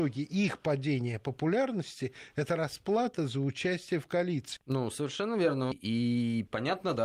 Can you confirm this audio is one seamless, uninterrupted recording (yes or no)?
no